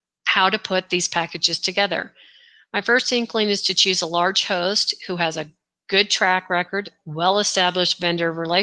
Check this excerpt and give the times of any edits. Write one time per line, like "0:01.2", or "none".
none